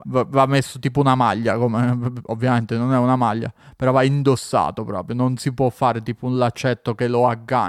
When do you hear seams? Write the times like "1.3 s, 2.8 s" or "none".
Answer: none